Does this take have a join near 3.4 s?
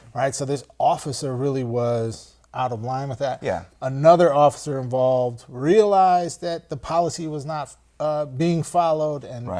no; 0 cuts

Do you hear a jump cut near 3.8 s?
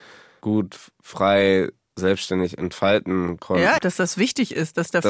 yes; 1 cut; at 3.8 s

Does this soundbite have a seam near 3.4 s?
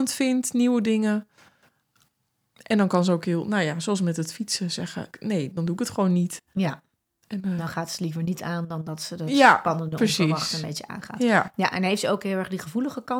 no; 1 cut; at 5.1 s

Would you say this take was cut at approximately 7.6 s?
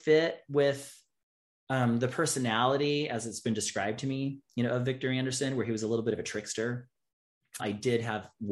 yes; 1 cut; at 7.6 s

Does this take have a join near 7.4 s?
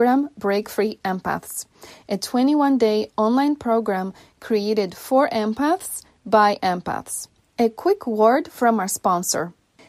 yes; 1 cut; at 7.4 s

